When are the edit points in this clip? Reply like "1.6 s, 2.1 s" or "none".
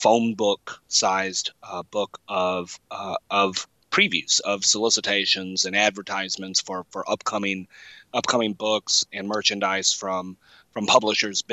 none